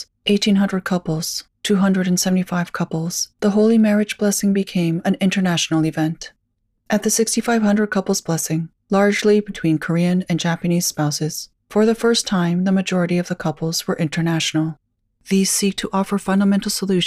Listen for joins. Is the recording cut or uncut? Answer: cut